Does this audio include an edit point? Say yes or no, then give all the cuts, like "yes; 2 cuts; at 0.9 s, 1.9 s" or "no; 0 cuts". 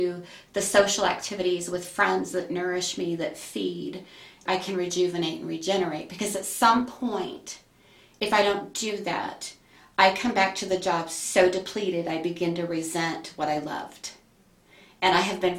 yes; 1 cut; at 4.5 s